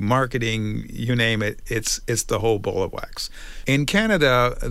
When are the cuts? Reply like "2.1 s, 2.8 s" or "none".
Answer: 3.6 s